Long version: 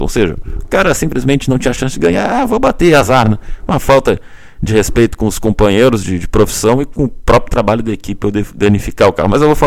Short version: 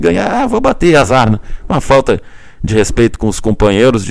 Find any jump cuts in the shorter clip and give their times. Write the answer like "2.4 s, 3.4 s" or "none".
none